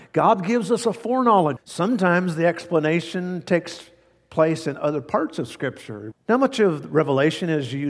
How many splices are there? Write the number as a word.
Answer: two